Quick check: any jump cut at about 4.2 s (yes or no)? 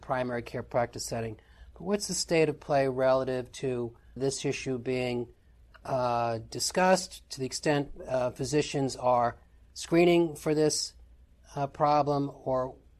yes